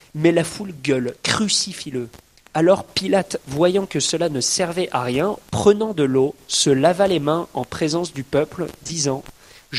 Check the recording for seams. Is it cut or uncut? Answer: cut